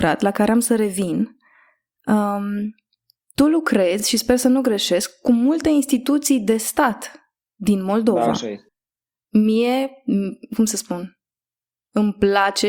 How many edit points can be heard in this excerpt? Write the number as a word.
zero